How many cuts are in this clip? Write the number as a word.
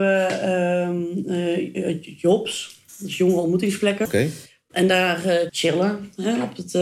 two